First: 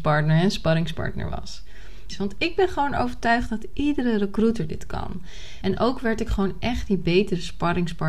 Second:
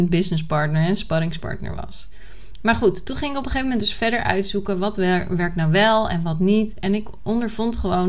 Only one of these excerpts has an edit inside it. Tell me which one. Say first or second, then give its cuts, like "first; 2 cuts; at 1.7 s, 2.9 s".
first; 2 cuts; at 2.1 s, 5.6 s